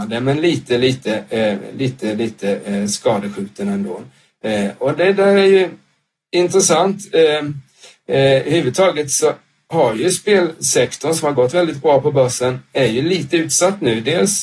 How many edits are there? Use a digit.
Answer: 0